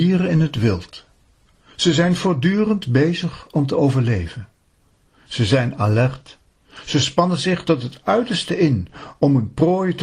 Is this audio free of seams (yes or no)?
yes